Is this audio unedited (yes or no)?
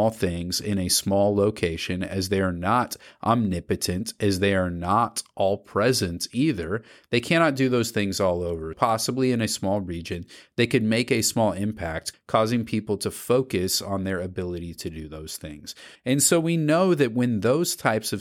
no